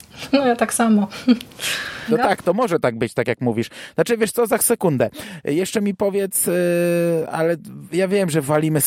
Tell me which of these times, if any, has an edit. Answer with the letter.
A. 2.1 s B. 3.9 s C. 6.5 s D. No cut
A